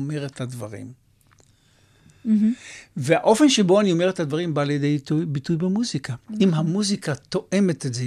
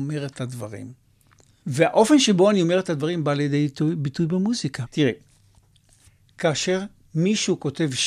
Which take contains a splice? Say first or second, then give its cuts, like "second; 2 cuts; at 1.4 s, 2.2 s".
second; 2 cuts; at 1.6 s, 4.9 s